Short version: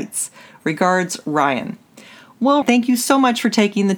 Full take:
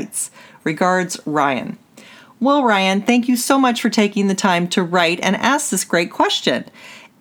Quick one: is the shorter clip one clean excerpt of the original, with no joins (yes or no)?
no